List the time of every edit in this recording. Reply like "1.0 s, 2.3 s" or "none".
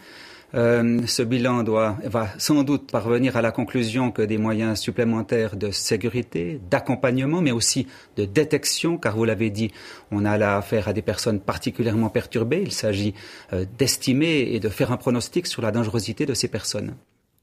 2.9 s